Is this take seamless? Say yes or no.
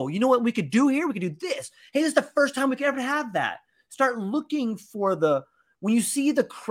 yes